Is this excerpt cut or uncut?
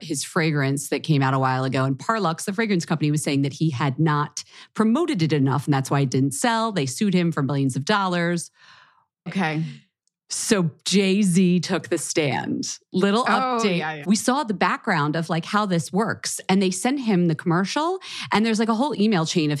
cut